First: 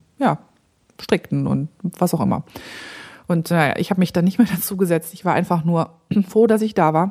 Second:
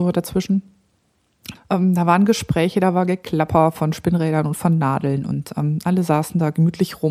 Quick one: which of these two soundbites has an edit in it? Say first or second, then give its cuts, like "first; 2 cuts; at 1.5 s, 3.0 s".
second; 1 cut; at 1.5 s